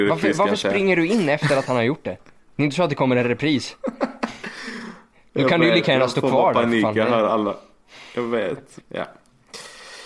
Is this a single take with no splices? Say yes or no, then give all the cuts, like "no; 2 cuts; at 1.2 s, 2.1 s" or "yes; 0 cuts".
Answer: no; 1 cut; at 8.8 s